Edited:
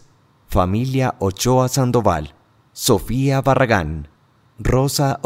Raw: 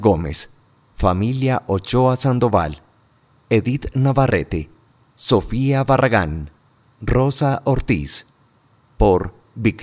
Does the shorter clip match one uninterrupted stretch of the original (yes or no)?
no